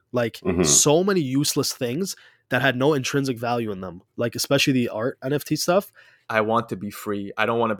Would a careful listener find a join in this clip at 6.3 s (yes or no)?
yes